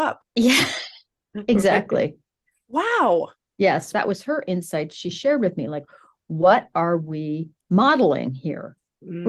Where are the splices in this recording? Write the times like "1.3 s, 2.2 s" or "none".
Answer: 3.9 s